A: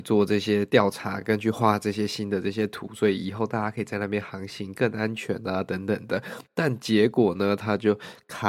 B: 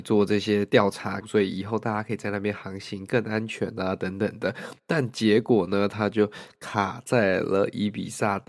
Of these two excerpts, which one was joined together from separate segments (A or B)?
B